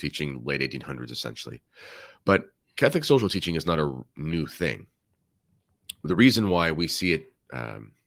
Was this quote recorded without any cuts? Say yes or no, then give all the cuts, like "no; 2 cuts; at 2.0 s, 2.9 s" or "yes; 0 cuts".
yes; 0 cuts